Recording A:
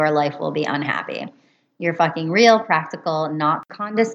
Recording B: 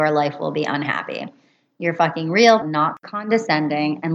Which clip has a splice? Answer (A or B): B